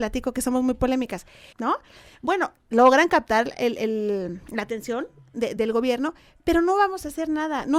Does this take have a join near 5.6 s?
yes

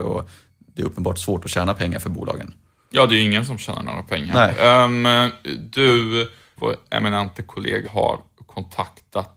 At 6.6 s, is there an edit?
yes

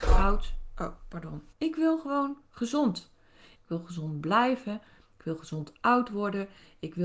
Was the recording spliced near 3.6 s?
yes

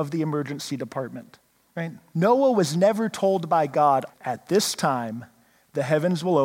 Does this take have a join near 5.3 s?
no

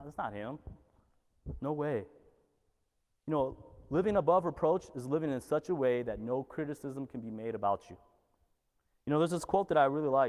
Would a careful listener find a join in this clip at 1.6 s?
no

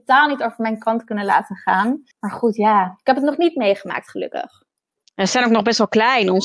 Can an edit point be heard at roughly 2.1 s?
yes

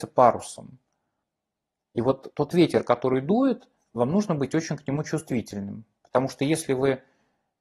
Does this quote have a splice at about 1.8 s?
no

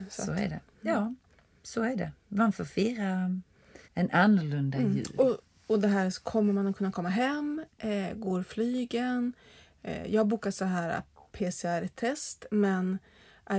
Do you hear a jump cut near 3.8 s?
yes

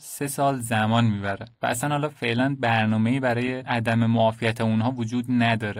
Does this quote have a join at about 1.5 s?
yes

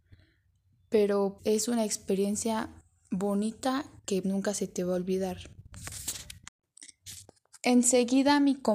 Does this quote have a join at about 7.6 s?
no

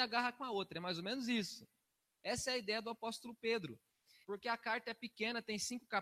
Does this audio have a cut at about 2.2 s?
yes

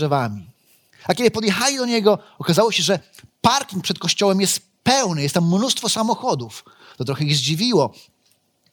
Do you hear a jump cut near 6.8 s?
no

